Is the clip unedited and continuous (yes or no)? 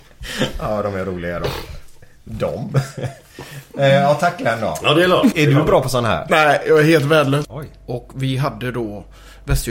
no